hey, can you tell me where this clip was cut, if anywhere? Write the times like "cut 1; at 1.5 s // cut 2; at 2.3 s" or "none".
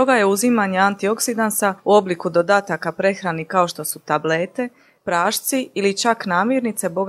cut 1; at 5.0 s